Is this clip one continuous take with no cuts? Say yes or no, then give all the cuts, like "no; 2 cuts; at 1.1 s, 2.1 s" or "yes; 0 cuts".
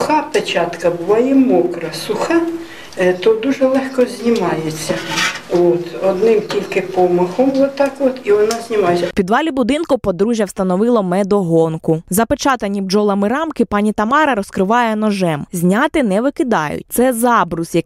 no; 1 cut; at 9.1 s